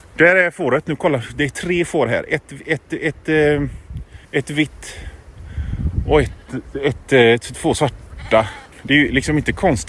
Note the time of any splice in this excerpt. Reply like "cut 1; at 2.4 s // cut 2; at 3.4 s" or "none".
cut 1; at 4.2 s // cut 2; at 8.7 s